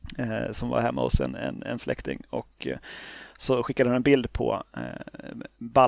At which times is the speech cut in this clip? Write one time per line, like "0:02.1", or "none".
none